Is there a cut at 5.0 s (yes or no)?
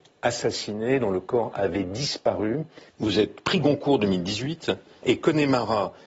yes